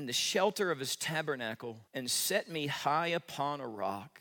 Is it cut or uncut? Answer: cut